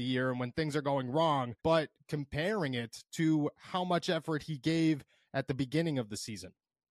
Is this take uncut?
no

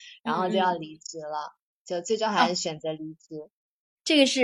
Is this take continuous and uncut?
yes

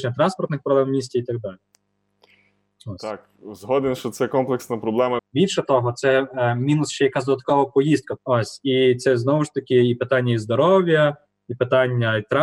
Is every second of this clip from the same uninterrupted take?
no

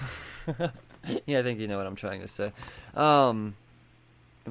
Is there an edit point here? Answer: no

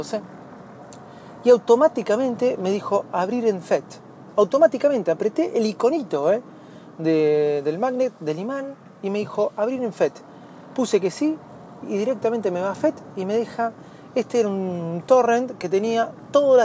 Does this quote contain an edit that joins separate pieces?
no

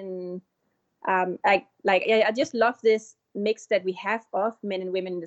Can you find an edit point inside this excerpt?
no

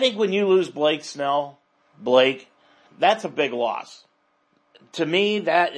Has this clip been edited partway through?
yes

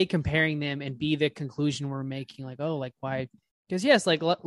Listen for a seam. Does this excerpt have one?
no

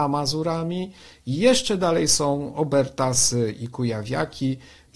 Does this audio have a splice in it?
no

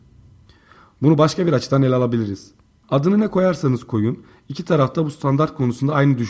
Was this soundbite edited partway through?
yes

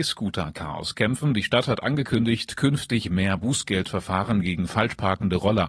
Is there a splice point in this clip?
no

